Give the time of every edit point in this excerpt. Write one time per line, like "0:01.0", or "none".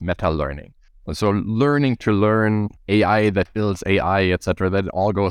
none